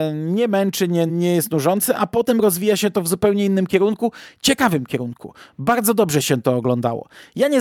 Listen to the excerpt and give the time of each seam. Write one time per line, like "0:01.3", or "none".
0:01.1